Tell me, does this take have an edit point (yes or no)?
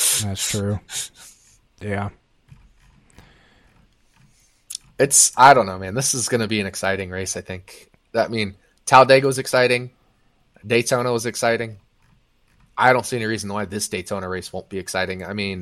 no